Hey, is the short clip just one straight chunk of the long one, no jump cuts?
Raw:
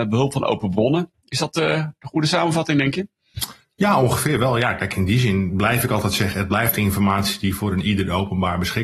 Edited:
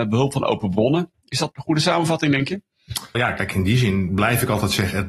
no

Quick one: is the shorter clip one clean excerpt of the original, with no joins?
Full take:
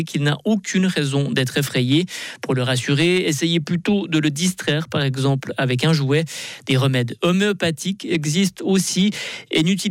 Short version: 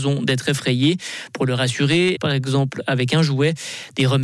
no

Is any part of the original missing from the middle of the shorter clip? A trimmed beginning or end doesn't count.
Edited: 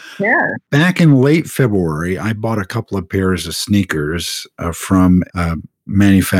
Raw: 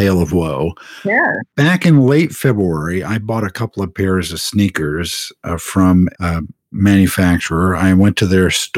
no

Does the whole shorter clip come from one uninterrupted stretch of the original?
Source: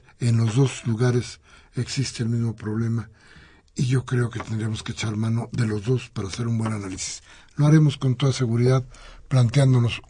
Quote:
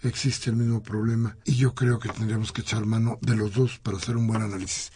no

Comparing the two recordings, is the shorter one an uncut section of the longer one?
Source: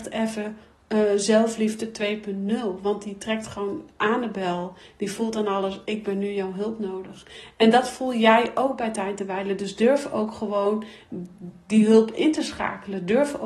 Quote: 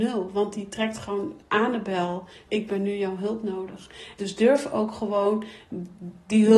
no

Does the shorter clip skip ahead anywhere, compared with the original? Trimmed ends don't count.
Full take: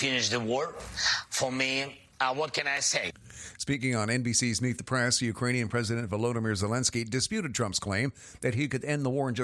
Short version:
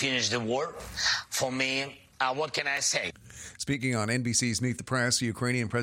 no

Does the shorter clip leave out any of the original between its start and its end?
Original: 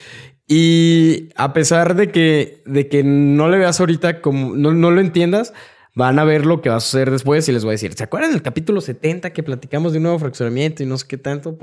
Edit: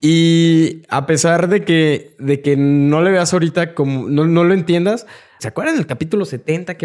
yes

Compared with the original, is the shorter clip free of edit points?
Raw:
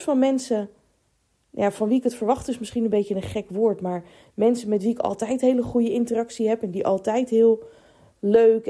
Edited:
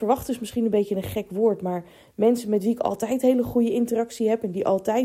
yes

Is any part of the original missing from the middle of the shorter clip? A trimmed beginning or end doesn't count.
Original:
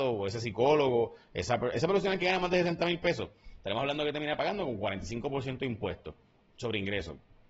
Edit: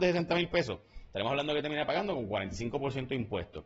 no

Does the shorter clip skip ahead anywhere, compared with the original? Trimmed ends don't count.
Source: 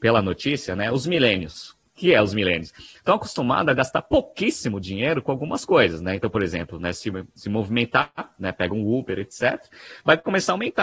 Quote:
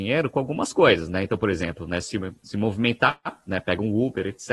no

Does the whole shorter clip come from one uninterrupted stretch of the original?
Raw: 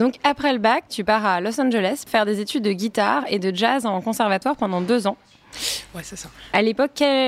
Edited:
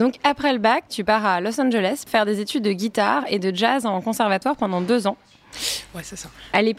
yes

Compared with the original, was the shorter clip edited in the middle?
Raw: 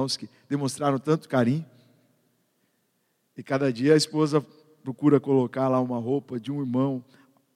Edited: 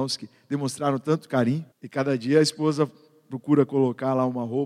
yes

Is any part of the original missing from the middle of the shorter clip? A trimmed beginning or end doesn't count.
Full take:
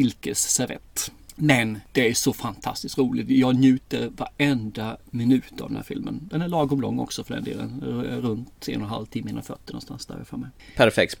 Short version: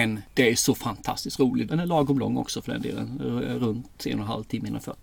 yes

